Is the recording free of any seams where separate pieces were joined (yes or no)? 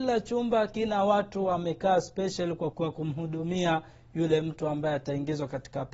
no